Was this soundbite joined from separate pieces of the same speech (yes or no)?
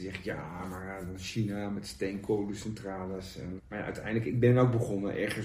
yes